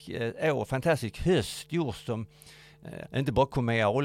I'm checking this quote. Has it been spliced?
yes; 1 cut; at 3.1 s

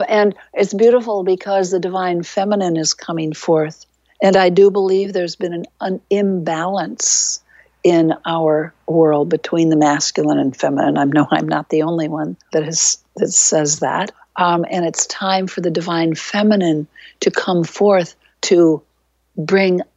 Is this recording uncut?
yes; 0 cuts

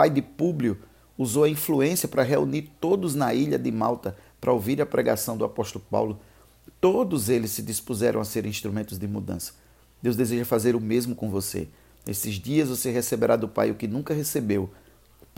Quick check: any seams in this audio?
no; 0 cuts

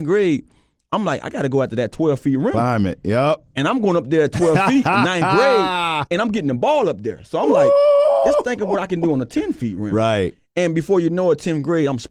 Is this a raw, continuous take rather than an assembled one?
yes; 0 cuts

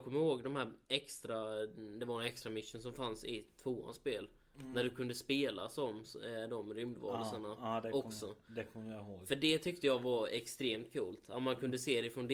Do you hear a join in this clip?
no; 0 cuts

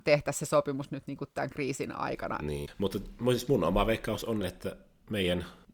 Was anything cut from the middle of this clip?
yes; 2 cuts; at 2.7 s, 4.4 s

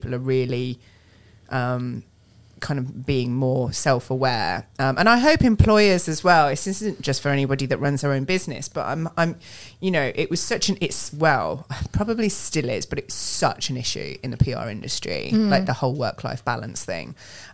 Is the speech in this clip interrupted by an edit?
no; 0 cuts

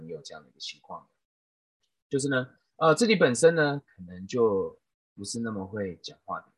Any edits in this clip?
no; 0 cuts

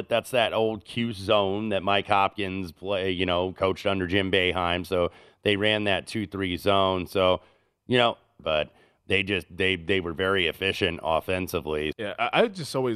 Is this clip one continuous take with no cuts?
no; 2 cuts; at 8.4 s, 11.9 s

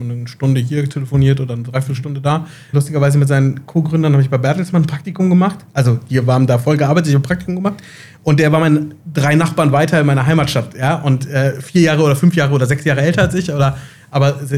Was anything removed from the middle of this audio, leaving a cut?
yes; 2 cuts; at 2.7 s, 9.0 s

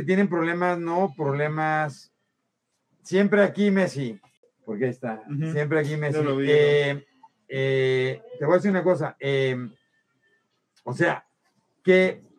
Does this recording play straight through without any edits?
yes; 0 cuts

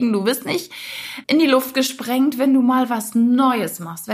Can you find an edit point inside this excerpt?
yes; 1 cut; at 1.2 s

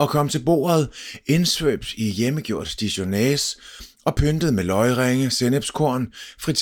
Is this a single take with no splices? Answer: yes; 0 cuts

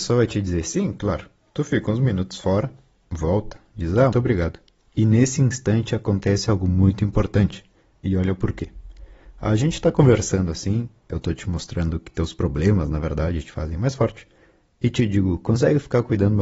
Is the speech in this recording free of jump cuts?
no; 2 cuts; at 4.1 s, 7.9 s

